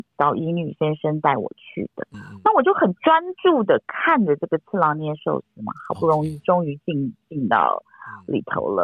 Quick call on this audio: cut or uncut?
cut